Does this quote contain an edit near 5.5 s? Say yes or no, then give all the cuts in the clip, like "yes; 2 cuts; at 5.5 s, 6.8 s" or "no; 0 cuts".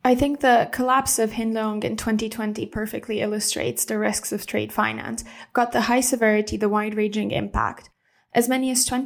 no; 0 cuts